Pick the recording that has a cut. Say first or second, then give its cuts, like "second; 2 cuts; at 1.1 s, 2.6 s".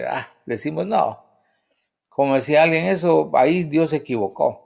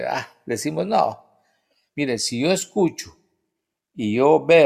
second; 1 cut; at 1.9 s